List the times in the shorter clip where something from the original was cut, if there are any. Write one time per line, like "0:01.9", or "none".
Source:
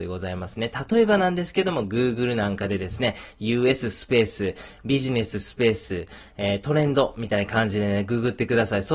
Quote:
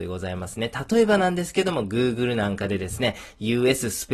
none